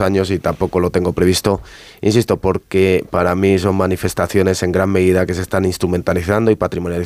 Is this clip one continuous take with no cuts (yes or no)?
yes